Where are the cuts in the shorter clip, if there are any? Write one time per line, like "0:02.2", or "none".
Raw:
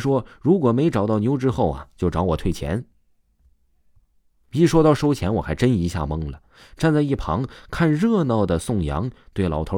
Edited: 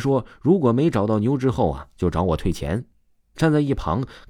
0:03.3